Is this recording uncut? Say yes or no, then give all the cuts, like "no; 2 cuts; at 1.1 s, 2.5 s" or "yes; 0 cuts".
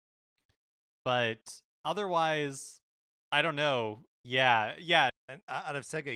no; 2 cuts; at 4.1 s, 5.1 s